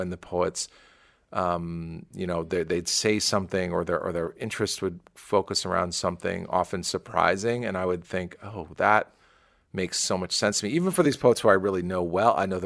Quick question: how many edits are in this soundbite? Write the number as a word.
zero